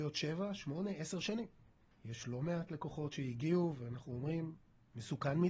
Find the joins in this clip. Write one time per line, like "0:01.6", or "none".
0:01.9